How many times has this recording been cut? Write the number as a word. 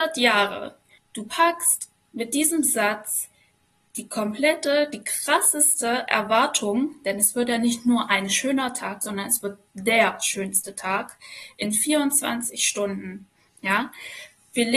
two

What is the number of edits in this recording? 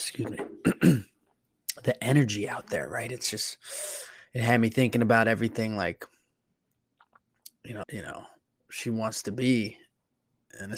one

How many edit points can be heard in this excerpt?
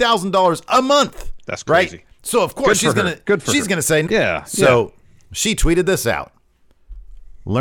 one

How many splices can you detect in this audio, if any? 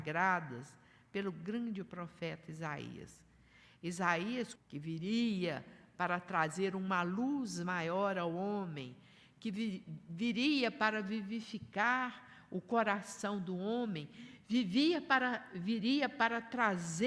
one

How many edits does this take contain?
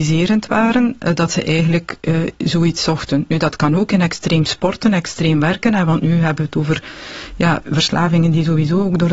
one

